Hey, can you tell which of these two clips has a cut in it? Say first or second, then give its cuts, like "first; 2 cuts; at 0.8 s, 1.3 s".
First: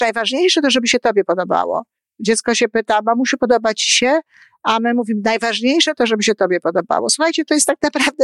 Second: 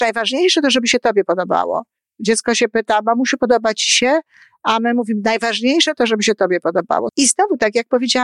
second; 1 cut; at 7.1 s